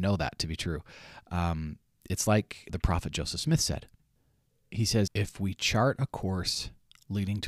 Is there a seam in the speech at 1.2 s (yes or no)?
no